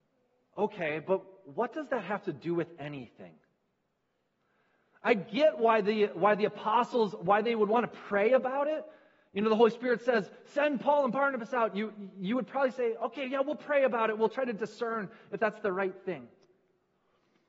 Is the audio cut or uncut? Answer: uncut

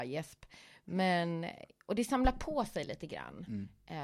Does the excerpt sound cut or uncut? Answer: uncut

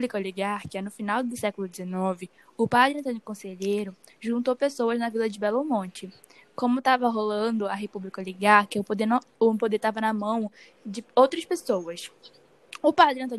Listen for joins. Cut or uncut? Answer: uncut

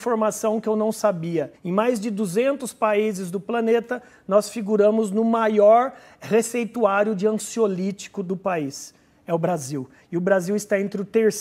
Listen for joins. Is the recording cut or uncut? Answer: cut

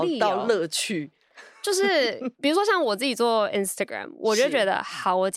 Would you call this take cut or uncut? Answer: uncut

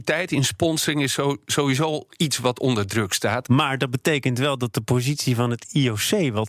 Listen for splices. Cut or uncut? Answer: cut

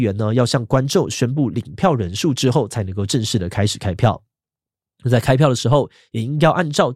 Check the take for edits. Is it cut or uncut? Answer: uncut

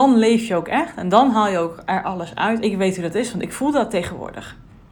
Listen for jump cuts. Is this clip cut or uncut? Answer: cut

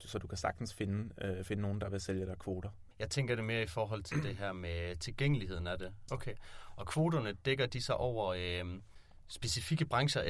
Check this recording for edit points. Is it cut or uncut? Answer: cut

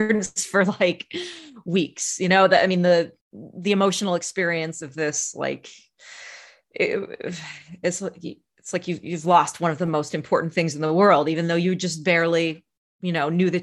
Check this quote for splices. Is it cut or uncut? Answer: cut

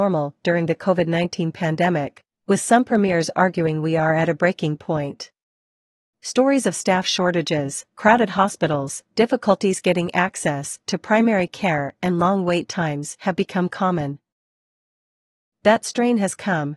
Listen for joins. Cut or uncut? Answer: uncut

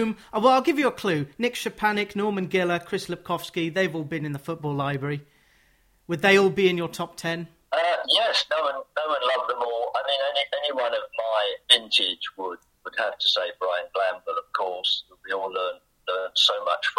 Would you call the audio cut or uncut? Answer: uncut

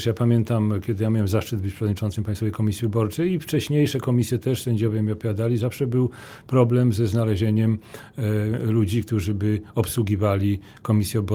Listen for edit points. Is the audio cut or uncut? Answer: uncut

